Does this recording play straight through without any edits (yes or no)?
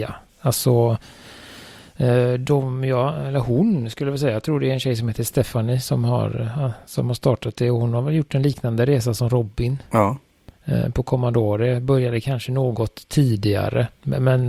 yes